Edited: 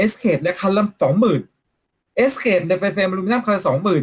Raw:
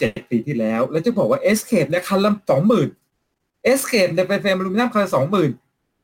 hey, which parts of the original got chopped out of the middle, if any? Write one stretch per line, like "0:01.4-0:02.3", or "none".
none